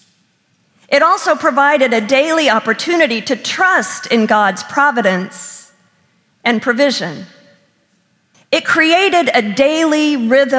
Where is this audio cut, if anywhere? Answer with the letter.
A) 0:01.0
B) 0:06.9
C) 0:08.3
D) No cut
C